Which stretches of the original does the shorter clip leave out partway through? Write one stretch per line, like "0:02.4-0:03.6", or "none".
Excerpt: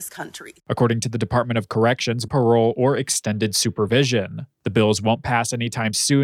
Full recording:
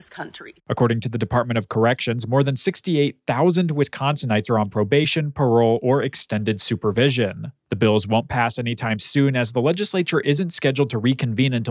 0:02.3-0:05.3